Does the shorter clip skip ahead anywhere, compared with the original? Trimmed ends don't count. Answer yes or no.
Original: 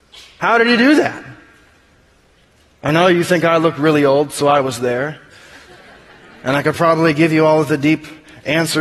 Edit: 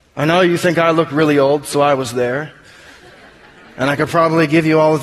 no